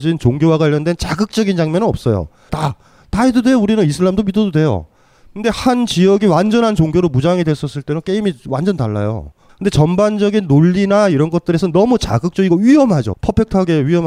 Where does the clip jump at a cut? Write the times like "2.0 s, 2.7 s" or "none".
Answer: 2.5 s, 9.5 s, 13.1 s